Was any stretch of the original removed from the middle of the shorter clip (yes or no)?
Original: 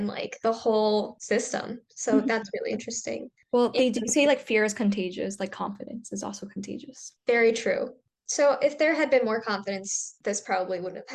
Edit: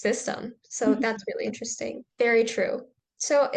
yes